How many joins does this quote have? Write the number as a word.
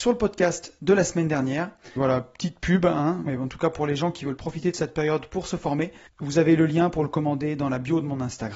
three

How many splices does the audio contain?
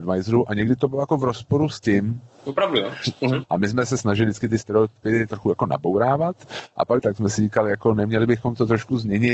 two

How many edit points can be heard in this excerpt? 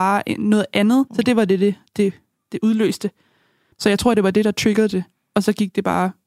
two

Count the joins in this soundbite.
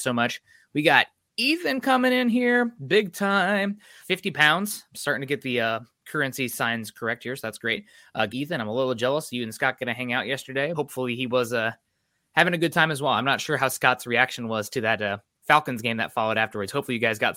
three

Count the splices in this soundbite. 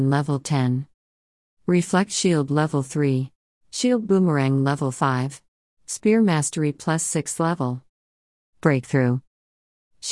two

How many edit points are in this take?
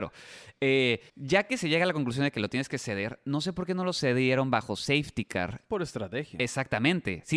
one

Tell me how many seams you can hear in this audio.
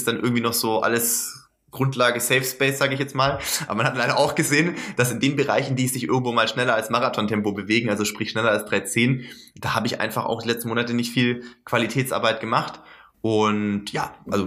one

